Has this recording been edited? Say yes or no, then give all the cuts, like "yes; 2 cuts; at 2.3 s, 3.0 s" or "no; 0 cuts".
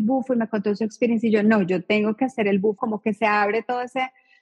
yes; 1 cut; at 2.8 s